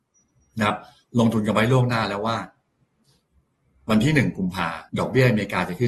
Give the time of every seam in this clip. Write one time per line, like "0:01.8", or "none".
0:04.9